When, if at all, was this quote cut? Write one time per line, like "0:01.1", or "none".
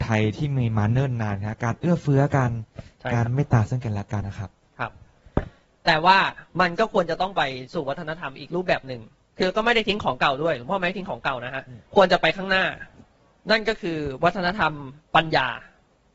0:04.2
0:06.5
0:11.9